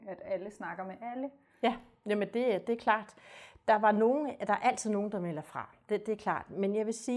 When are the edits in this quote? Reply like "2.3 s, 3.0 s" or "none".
none